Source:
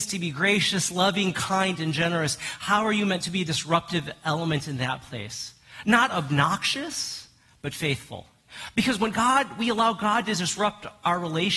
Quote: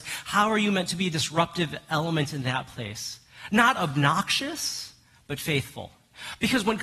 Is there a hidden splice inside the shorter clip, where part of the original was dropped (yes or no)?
no